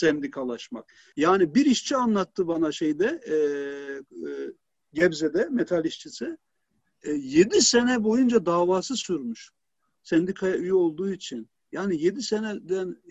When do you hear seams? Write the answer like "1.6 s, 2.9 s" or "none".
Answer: 1.1 s